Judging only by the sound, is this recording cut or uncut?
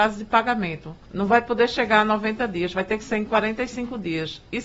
cut